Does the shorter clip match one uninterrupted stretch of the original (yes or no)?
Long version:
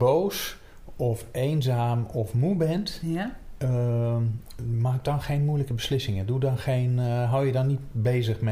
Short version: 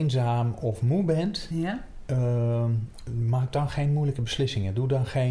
yes